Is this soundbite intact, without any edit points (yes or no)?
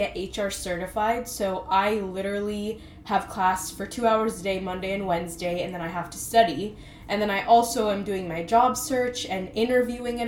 yes